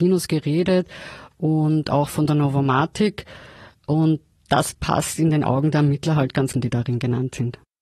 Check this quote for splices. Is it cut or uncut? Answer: cut